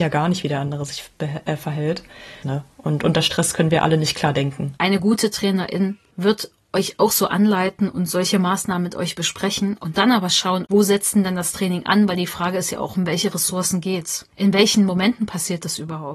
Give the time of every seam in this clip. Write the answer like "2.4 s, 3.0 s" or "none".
2.4 s, 4.8 s, 10.6 s